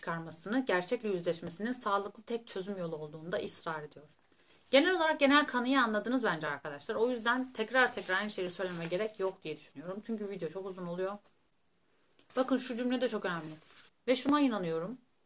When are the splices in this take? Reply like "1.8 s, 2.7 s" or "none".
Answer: 13.9 s